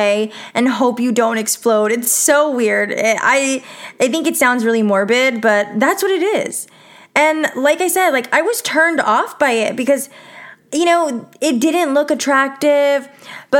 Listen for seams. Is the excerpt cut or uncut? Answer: uncut